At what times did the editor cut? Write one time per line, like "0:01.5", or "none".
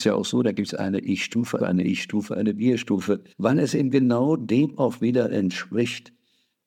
0:01.6
0:03.3